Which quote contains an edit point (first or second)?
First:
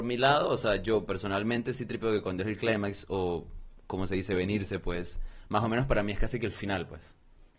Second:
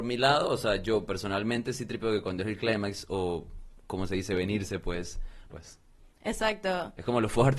second